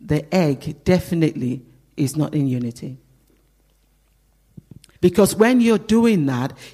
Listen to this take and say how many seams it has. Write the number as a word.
one